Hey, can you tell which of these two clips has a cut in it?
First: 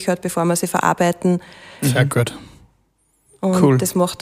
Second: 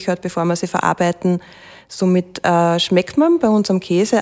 first; 1 cut; at 1.8 s

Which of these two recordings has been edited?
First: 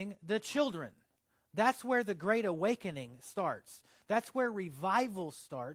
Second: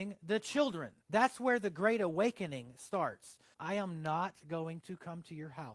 second; 2 cuts; at 1.0 s, 3.5 s

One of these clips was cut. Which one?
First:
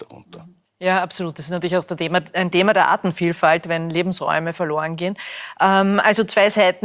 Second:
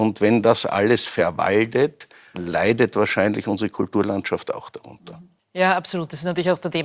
second; 1 cut; at 2.3 s

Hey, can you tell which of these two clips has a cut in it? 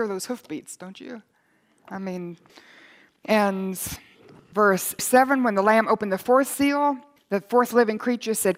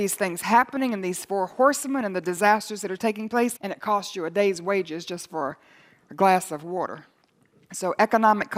second; 1 cut; at 3.6 s

